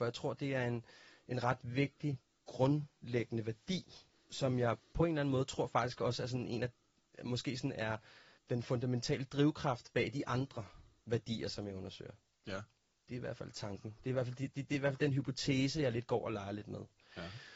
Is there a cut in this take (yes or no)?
no